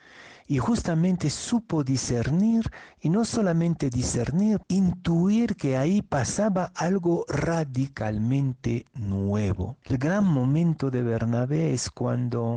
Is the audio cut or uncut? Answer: cut